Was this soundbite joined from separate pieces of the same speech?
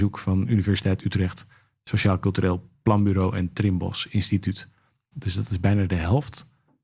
yes; 1 cut; at 5.1 s

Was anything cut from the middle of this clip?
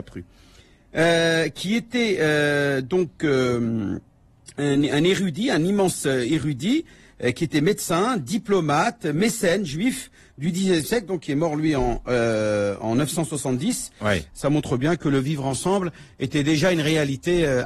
yes; 1 cut; at 14.3 s

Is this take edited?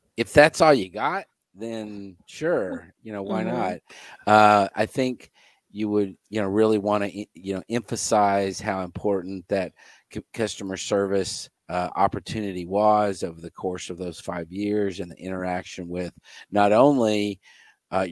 yes; 3 cuts; at 4.7 s, 6.2 s, 11.6 s

